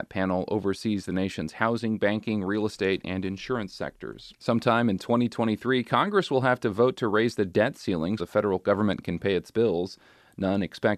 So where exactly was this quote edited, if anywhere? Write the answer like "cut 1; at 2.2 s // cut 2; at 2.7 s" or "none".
cut 1; at 4.3 s // cut 2; at 8.2 s